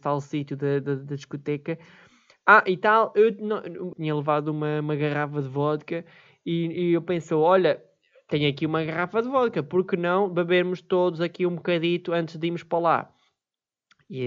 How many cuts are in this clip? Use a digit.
1